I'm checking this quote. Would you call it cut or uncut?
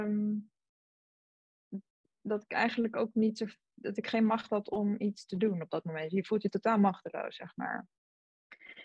cut